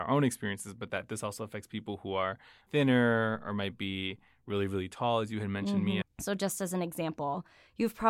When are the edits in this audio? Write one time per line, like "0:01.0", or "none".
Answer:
0:06.0

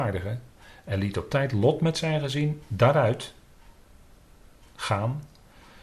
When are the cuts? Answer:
none

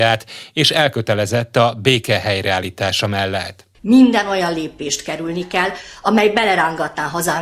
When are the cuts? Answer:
0:03.7

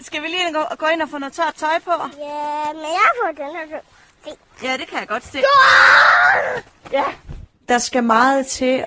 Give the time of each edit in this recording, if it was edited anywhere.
none

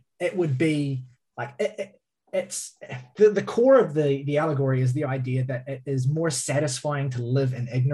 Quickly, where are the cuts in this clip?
none

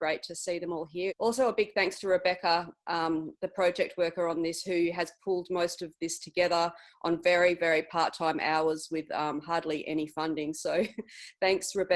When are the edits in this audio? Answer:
0:01.1

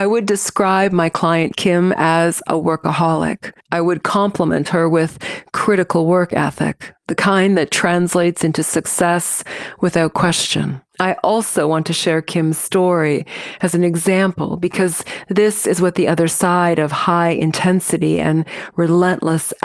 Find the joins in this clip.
0:03.6
0:10.9

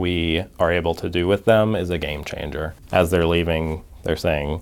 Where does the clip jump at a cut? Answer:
none

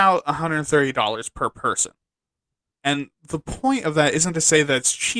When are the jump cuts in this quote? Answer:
0:02.7

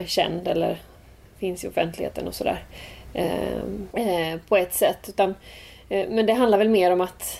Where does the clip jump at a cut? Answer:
0:03.9

